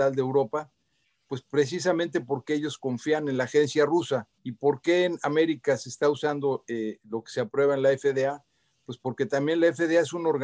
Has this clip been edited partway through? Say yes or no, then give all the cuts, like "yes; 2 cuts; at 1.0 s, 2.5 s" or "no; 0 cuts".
yes; 1 cut; at 4.3 s